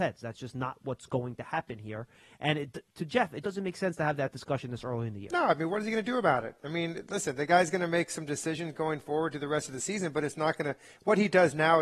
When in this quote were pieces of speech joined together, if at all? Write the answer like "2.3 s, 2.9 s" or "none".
3.4 s